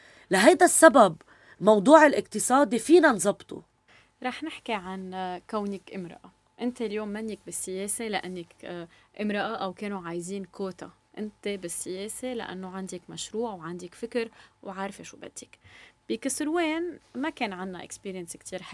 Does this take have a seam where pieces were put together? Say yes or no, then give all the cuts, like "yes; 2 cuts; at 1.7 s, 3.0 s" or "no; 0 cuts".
no; 0 cuts